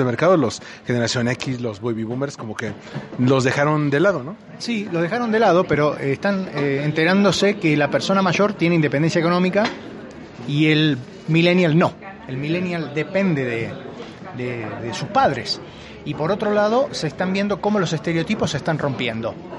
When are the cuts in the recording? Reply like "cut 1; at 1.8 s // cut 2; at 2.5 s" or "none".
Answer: cut 1; at 14.8 s